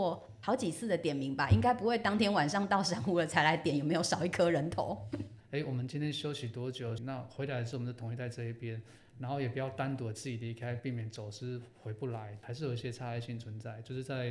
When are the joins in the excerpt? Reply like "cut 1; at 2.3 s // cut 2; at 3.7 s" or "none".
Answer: cut 1; at 5.4 s // cut 2; at 7.0 s // cut 3; at 12.4 s